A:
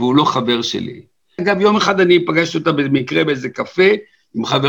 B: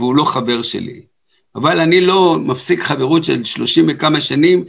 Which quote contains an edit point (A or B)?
A